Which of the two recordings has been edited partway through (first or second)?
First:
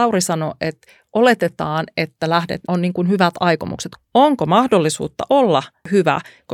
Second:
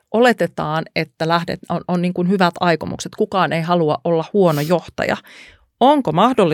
first